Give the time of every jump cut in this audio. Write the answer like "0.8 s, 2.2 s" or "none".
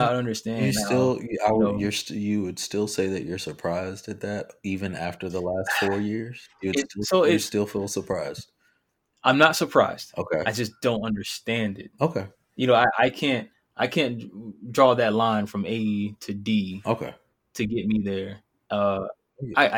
18.7 s